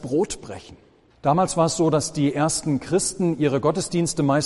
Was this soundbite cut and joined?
yes; 1 cut; at 1.1 s

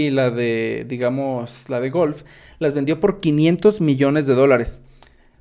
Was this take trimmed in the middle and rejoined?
no; 0 cuts

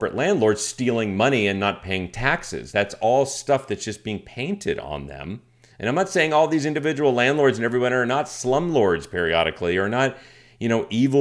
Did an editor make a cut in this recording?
no; 0 cuts

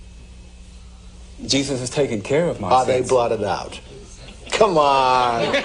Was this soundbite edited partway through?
no; 0 cuts

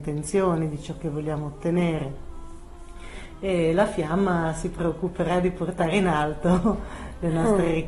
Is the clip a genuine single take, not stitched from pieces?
yes; 0 cuts

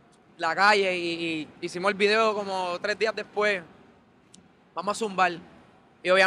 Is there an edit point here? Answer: yes; 1 cut; at 1.5 s

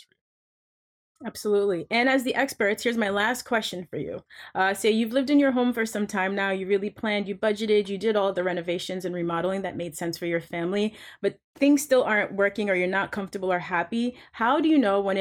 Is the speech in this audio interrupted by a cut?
no; 0 cuts

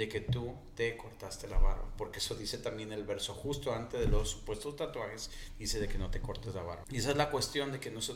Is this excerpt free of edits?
no; 1 cut; at 6.8 s

